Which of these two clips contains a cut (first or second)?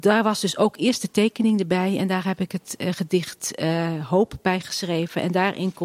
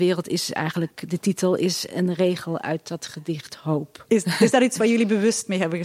second